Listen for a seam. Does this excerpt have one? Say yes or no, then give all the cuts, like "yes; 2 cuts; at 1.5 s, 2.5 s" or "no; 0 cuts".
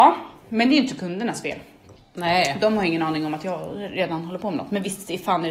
no; 0 cuts